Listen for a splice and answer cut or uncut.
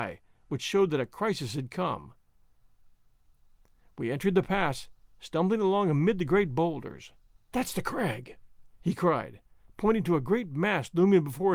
cut